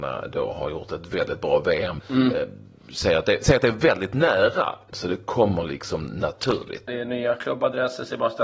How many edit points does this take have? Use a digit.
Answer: 3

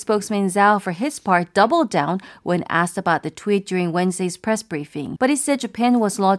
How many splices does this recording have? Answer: 1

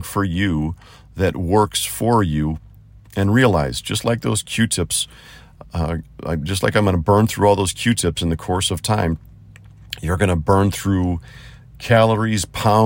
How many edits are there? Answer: 0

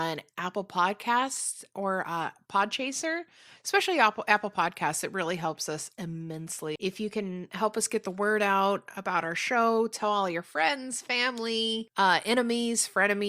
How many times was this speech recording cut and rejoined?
1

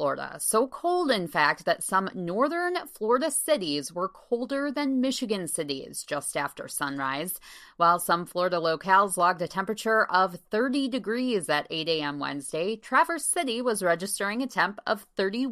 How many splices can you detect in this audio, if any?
0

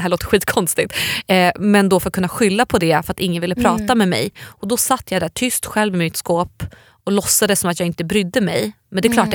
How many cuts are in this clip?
0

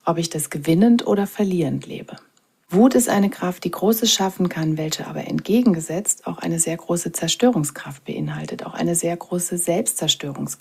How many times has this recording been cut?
0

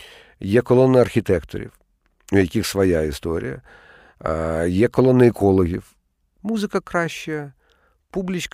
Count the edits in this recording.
1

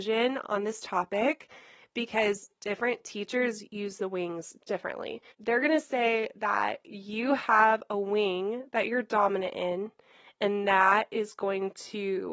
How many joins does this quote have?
1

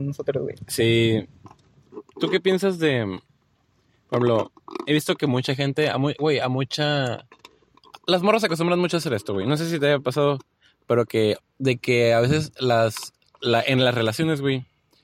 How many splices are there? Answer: 1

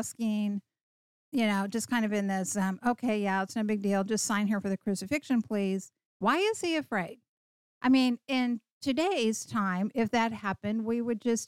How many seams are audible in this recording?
1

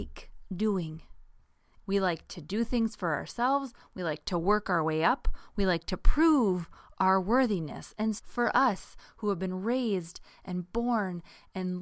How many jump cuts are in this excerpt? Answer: 2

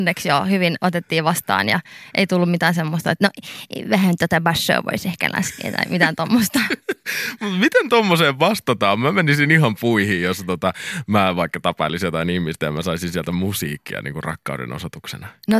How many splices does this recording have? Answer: 0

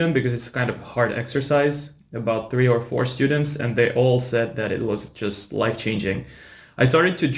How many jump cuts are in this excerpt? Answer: 0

